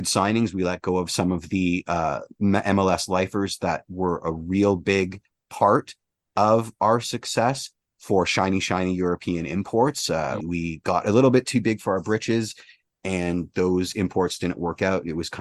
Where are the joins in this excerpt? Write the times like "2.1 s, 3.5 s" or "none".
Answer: 10.4 s